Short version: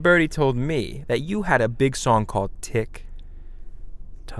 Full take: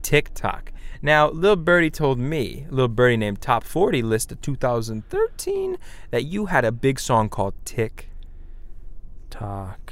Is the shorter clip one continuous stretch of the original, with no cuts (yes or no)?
no